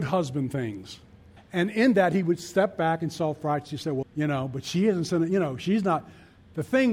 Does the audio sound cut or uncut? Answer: cut